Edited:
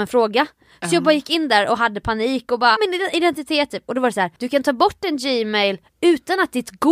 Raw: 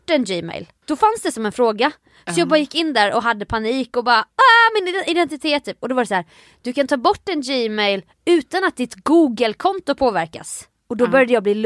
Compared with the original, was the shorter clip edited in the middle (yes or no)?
yes